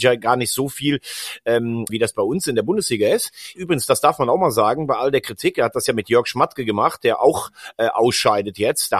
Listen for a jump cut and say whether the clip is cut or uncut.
cut